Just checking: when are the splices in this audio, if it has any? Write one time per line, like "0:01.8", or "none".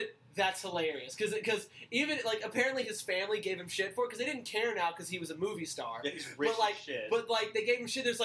none